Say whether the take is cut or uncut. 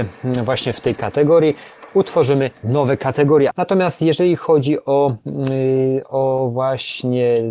cut